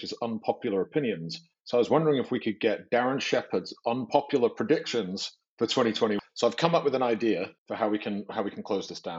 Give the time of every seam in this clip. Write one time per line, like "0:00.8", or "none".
0:06.2
0:07.6